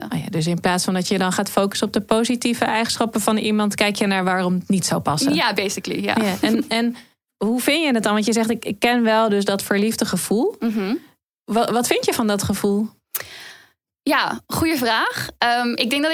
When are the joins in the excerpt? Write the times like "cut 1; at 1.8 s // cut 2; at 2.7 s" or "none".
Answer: none